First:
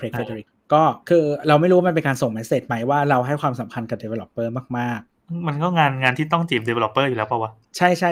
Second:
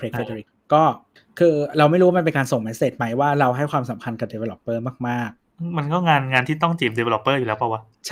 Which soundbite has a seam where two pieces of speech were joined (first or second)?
first